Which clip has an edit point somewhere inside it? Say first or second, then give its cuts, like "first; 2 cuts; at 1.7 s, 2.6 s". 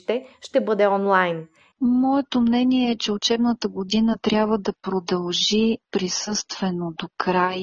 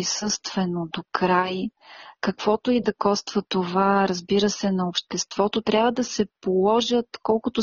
first; 1 cut; at 1.7 s